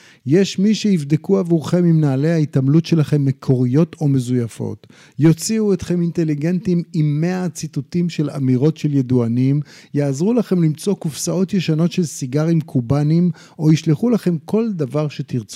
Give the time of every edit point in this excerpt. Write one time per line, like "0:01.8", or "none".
none

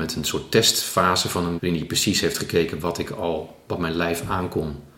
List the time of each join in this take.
0:01.6

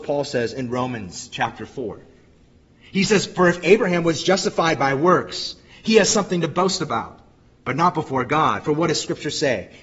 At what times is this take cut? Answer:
none

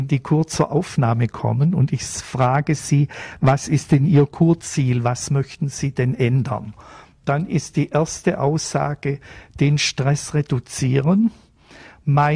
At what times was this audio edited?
none

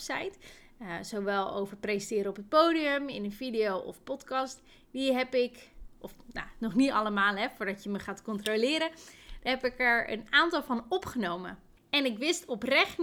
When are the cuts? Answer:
0:11.8

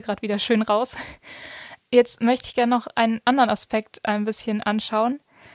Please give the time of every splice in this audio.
none

